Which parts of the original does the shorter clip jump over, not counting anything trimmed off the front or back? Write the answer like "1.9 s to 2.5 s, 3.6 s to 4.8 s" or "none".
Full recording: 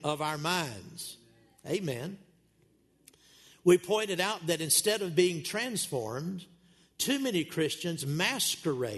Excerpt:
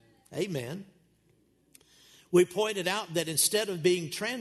none